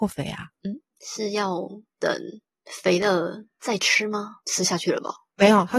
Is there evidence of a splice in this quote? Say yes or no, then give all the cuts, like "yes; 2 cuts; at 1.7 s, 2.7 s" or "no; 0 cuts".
yes; 1 cut; at 4.4 s